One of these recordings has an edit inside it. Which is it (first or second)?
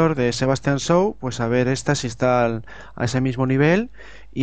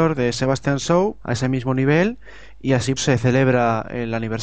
second